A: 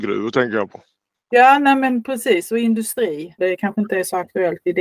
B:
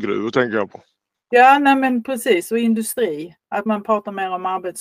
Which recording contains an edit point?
A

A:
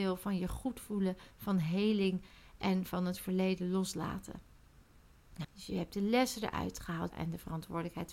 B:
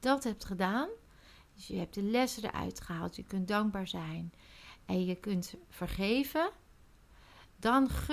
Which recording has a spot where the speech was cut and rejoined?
A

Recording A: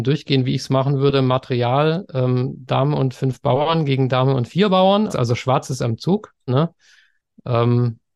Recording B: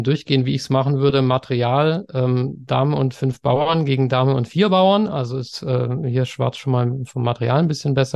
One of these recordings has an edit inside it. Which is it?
A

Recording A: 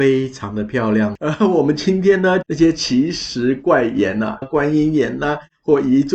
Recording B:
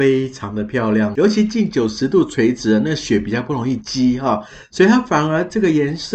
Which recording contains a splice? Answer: A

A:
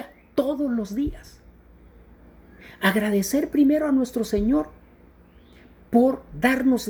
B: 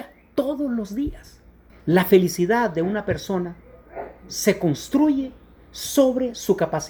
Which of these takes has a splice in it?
B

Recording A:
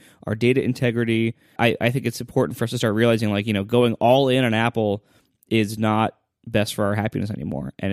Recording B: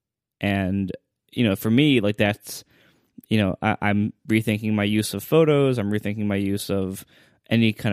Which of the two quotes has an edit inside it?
A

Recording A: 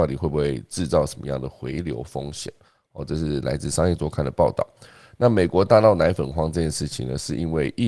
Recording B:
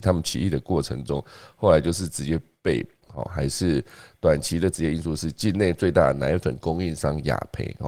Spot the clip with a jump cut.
B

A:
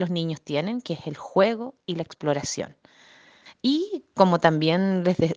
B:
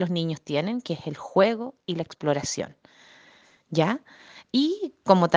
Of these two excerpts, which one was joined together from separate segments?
A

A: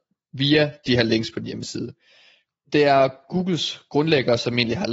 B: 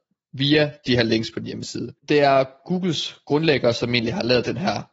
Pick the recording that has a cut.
B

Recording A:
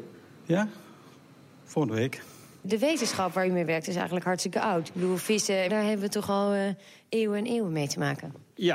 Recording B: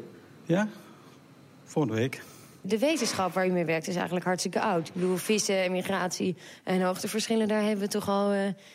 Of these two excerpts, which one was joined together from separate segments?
A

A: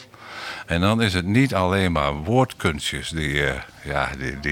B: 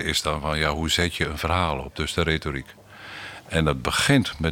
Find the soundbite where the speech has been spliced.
B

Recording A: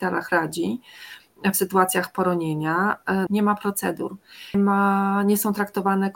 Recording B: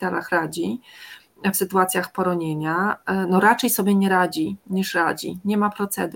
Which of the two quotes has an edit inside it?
A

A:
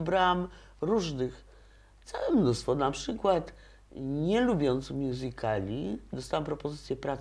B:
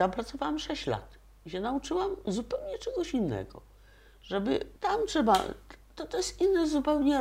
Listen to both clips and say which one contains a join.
B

